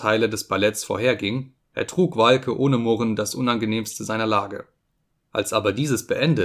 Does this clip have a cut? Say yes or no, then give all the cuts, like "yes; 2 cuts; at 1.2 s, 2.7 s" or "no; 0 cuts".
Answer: no; 0 cuts